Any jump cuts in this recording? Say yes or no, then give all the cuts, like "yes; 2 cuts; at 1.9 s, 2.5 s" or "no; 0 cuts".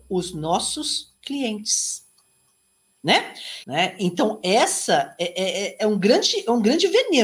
yes; 2 cuts; at 1.2 s, 3.6 s